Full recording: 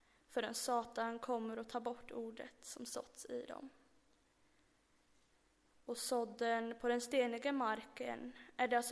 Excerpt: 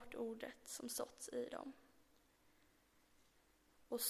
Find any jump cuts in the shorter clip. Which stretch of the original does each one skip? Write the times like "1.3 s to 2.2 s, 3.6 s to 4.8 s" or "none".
none

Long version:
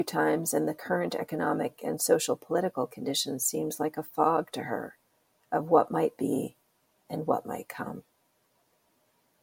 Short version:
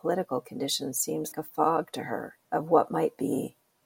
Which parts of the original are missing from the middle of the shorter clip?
3.8 s to 3.9 s, 5.0 s to 5.5 s

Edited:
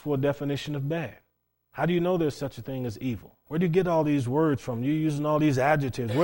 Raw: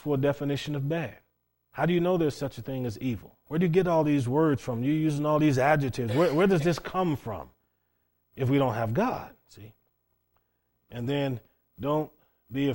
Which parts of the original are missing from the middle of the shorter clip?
none

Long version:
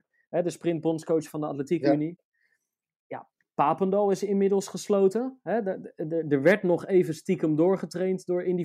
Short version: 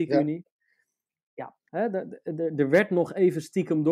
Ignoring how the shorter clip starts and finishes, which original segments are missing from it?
3.4 s to 5.4 s

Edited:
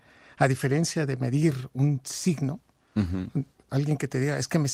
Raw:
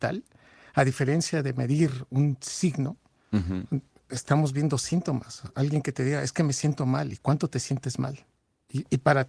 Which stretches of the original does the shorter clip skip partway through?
4.1 s to 5.5 s

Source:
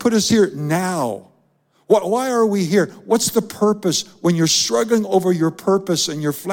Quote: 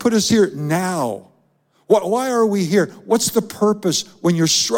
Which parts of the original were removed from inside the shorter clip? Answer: none

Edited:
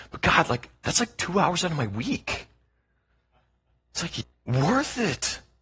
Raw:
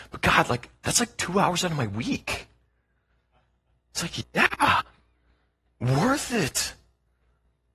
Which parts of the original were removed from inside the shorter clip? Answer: 4.3 s to 5.6 s

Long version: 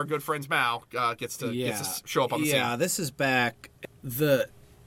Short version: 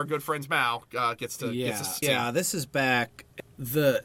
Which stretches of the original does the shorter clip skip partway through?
2.0 s to 2.5 s

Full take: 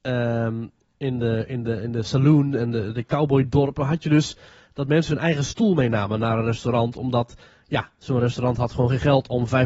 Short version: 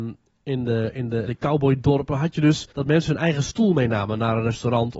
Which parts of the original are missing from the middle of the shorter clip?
1.8 s to 2.9 s, 4.4 s to 4.7 s

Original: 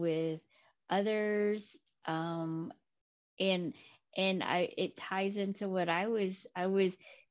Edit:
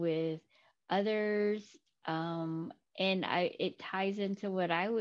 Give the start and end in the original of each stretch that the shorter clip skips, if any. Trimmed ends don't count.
2.9 s to 4.0 s

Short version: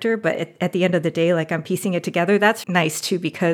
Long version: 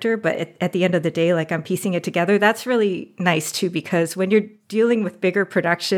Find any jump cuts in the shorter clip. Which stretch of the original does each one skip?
2.6 s to 3.1 s

